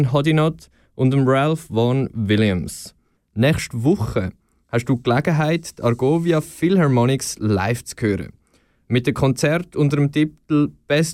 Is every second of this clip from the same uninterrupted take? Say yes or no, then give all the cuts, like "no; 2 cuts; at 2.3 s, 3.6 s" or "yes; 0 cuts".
no; 1 cut; at 3.2 s